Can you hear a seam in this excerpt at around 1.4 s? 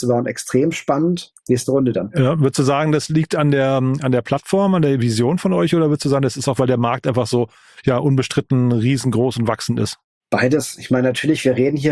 yes; 1 cut; at 1.4 s

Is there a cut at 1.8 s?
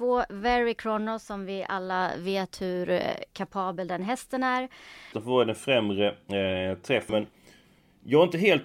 no; 2 cuts; at 5.1 s, 7.1 s

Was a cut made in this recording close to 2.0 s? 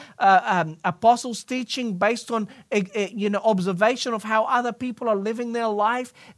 no; 0 cuts

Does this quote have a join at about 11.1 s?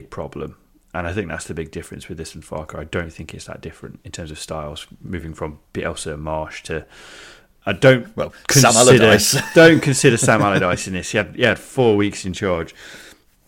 no; 1 cut; at 4.0 s

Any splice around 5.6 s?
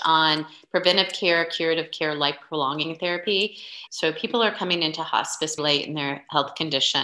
yes; 2 cuts; at 3.9 s, 5.6 s

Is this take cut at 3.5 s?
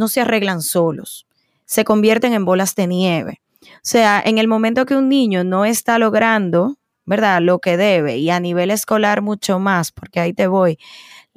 no; 0 cuts

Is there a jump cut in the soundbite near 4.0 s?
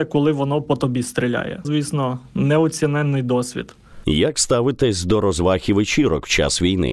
no; 1 cut; at 1.6 s

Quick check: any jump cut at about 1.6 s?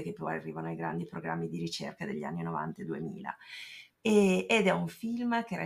no; 1 cut; at 3.9 s

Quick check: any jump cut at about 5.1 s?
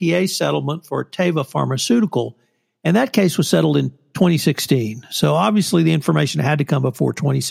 no; 0 cuts

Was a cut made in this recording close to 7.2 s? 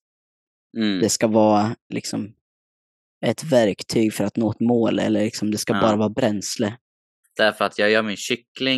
yes; 2 cuts; at 1.9 s, 7.2 s

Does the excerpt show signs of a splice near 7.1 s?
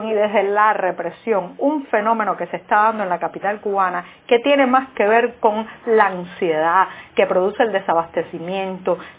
yes; 1 cut; at 7.1 s

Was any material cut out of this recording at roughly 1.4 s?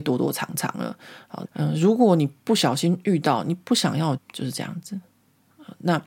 yes; 2 cuts; at 1.4 s, 4.2 s

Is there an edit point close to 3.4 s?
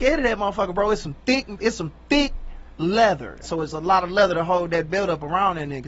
yes; 1 cut; at 3.4 s

